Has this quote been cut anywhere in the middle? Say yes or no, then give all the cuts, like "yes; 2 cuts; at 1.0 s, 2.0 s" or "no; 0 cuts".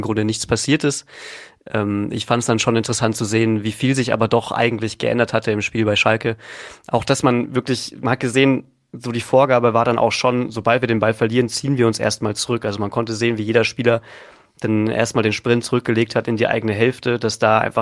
no; 0 cuts